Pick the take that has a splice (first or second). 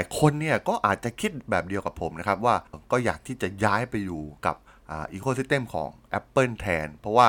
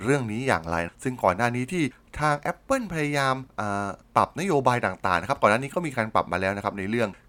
first